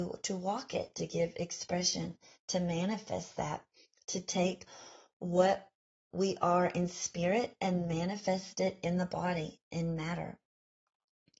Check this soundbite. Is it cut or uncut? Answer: uncut